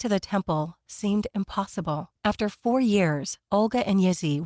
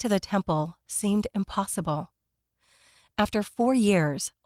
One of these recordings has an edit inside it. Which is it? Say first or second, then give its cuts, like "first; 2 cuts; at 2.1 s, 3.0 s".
first; 1 cut; at 2.2 s